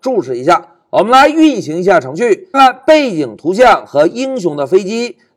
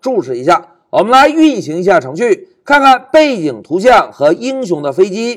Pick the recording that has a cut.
first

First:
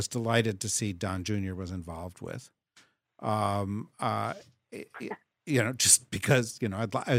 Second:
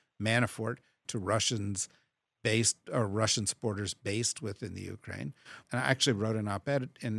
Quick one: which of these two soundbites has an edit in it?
second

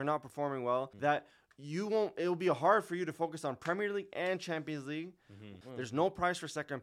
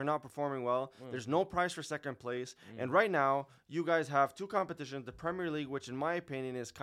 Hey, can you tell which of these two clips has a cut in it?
first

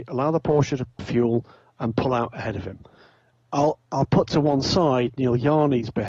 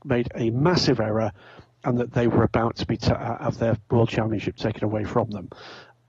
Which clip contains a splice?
first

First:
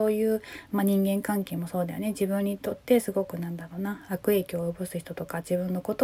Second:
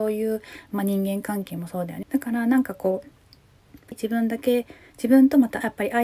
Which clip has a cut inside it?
second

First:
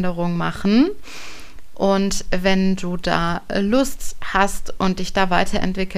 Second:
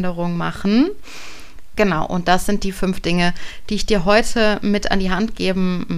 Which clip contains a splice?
second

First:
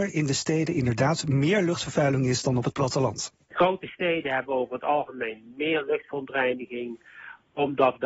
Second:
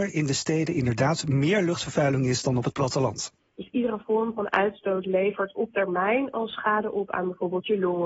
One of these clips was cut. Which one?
second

